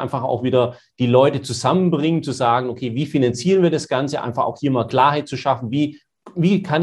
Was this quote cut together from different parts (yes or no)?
no